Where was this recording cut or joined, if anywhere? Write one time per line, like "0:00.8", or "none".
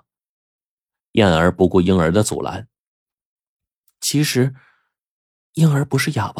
none